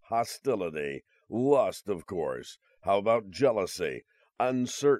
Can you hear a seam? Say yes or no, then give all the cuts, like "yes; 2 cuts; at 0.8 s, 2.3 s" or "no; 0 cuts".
no; 0 cuts